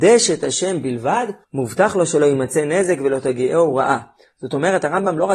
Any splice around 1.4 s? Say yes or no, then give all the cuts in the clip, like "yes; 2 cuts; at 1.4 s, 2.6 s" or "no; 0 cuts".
yes; 1 cut; at 1.4 s